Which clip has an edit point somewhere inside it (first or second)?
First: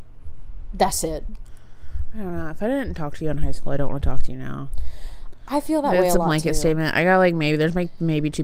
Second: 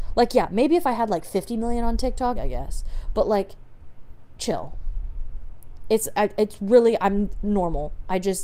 second